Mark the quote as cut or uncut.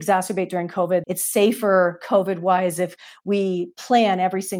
cut